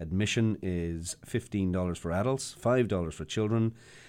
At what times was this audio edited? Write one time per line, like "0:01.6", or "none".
none